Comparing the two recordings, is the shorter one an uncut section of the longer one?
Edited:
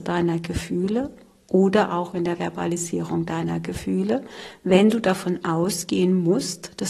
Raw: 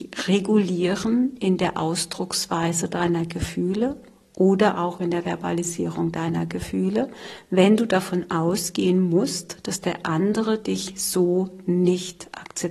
yes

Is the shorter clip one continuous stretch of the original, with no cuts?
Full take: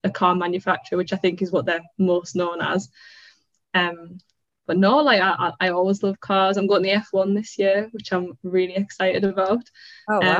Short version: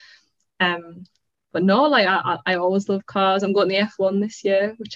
yes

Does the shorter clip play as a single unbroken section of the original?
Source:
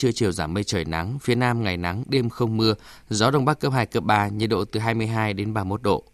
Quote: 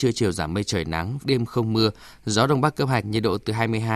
no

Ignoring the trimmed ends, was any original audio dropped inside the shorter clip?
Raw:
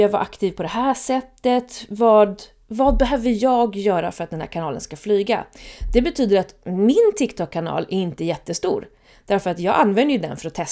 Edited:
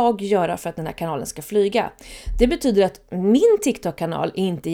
no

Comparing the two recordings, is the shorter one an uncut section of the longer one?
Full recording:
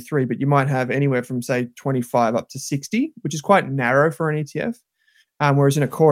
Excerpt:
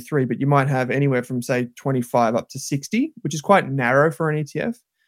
yes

